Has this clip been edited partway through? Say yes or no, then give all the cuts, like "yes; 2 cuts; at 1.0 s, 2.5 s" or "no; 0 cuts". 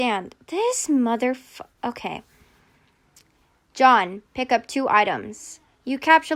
no; 0 cuts